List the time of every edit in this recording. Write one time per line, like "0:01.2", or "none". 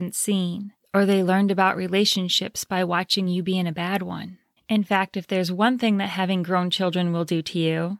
0:04.6